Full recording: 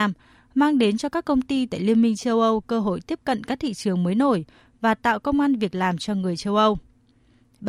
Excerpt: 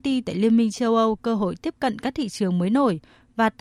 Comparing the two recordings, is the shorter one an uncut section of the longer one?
yes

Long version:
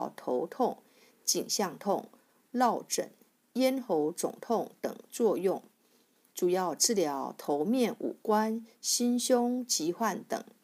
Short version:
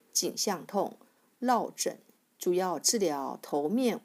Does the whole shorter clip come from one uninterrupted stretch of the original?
no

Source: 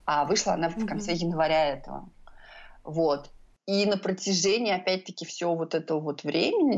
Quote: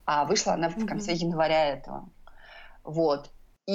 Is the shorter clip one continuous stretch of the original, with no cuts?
yes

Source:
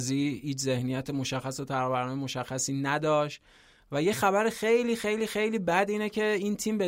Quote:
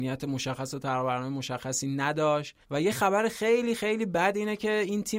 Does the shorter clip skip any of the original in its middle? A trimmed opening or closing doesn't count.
yes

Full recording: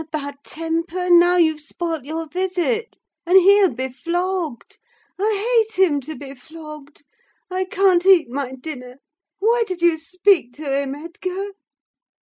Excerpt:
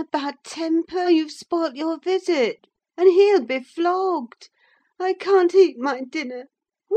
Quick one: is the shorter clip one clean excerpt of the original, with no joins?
no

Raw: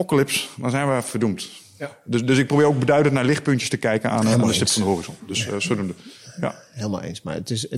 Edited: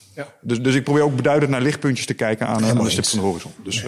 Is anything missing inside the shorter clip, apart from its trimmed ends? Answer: no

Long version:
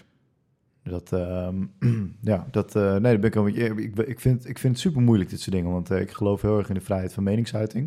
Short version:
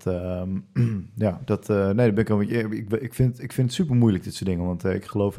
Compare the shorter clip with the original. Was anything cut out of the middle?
no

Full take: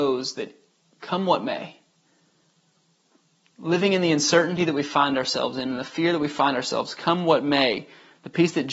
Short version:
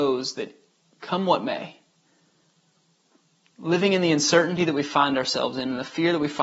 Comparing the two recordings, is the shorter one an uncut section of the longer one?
yes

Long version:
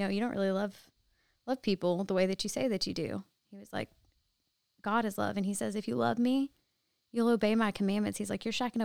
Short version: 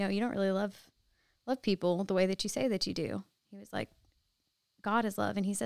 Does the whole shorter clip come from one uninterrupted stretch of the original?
yes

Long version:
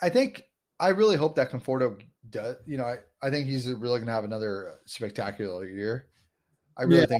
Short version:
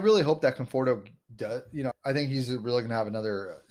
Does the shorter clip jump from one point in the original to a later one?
yes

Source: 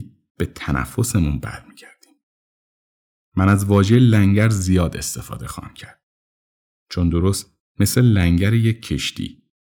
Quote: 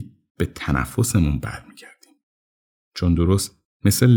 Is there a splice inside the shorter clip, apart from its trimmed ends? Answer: yes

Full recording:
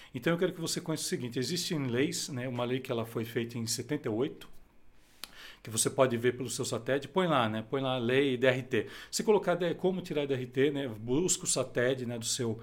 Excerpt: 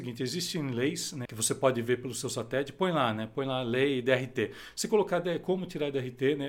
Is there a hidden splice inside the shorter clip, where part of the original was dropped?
yes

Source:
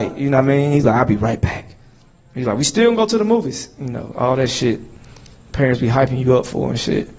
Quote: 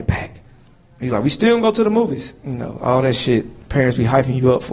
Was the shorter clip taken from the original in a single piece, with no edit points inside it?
no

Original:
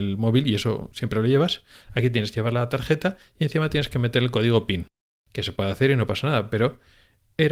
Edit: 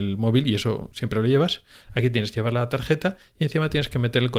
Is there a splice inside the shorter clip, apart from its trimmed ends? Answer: no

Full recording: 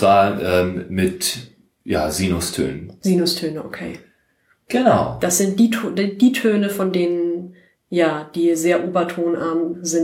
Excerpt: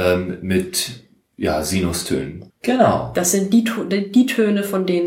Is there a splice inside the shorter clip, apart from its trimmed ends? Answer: yes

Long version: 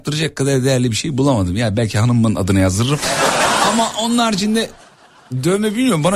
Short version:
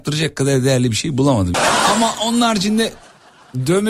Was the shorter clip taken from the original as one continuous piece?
no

